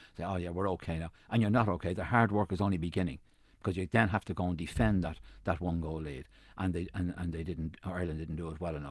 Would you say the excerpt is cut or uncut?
uncut